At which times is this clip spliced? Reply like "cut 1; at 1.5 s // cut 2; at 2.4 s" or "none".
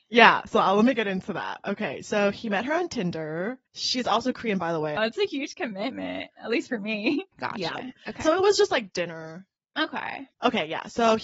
cut 1; at 5.0 s // cut 2; at 7.3 s